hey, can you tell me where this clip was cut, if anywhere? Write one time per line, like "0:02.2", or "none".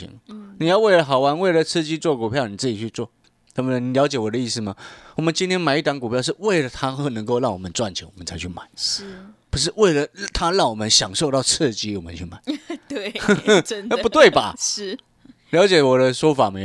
none